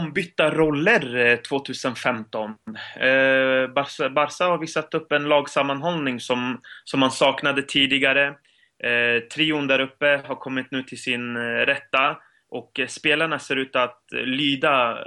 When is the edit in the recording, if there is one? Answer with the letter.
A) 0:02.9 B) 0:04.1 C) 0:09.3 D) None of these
D